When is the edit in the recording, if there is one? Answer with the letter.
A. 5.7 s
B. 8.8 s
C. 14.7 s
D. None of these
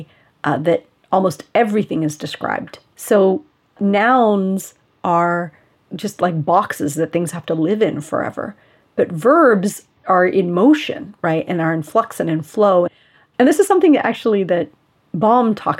D